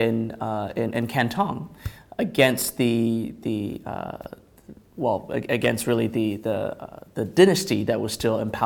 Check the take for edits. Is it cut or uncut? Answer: uncut